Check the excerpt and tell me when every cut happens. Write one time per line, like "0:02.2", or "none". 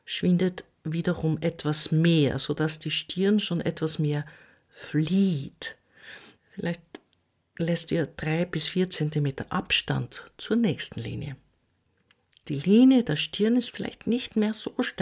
0:06.4
0:12.4